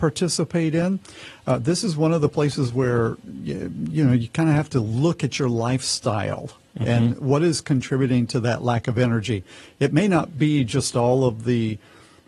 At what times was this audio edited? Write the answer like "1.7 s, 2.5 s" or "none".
none